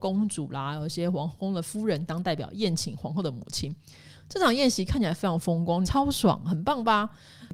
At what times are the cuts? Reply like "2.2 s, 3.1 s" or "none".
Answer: 5.9 s